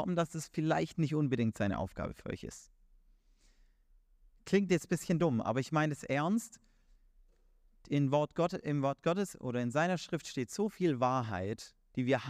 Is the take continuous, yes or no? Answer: yes